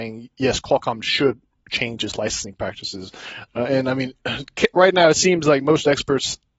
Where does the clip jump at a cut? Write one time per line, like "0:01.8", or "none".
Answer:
0:03.5